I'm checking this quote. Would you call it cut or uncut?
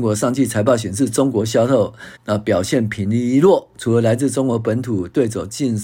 cut